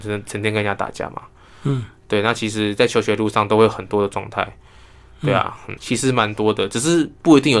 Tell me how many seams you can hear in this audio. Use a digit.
1